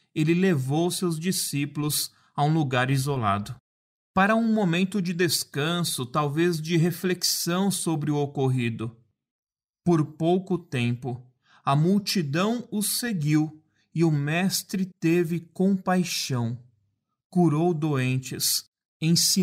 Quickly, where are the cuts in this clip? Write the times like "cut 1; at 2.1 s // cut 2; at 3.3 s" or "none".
none